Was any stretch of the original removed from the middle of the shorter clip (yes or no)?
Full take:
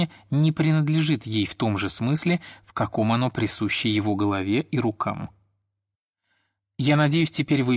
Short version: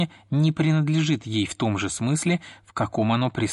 no